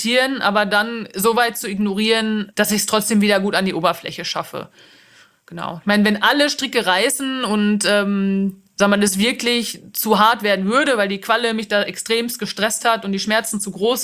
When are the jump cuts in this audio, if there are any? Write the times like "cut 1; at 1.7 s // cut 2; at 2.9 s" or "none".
none